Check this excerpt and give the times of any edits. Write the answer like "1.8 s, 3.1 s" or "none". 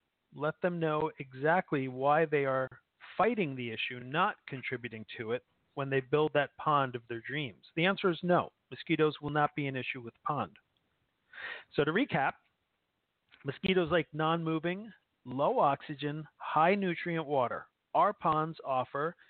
none